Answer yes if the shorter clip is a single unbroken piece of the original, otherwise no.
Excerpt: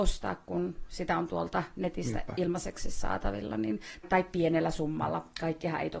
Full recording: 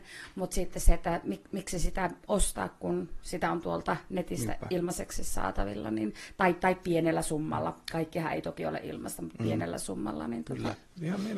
no